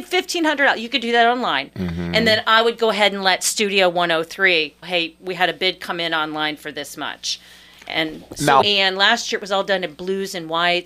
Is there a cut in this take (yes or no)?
yes